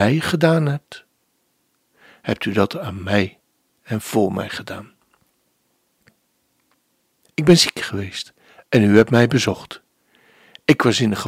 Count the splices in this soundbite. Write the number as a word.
one